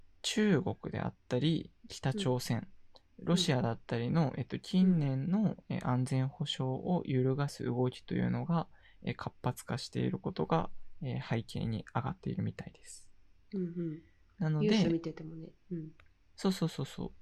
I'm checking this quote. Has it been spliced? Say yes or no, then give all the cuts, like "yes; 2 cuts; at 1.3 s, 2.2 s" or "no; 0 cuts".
no; 0 cuts